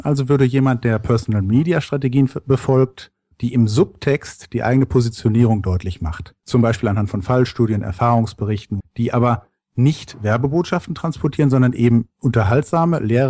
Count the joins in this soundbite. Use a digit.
3